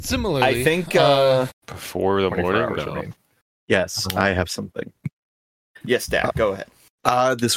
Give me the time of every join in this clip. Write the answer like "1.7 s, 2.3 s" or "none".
1.5 s